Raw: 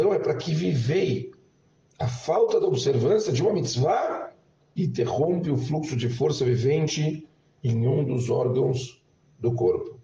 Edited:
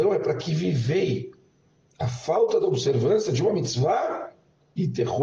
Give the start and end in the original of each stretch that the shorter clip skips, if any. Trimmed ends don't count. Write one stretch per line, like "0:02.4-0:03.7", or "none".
none